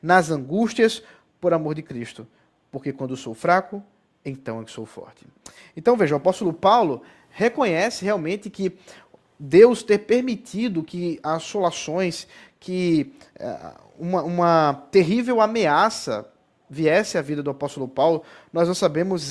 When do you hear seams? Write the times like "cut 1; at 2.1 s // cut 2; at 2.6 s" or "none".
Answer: none